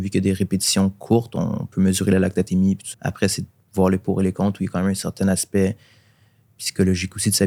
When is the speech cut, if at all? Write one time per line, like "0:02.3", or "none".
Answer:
0:02.9